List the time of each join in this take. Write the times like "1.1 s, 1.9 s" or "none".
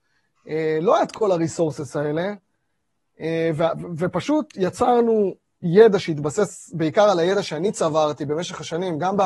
none